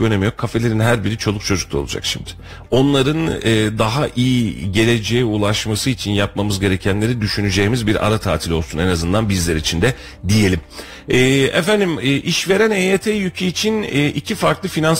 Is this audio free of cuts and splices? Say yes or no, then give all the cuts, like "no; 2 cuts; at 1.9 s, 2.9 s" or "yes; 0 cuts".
no; 1 cut; at 2.7 s